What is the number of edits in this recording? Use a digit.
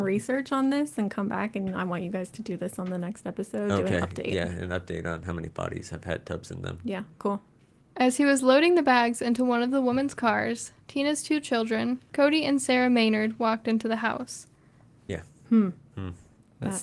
1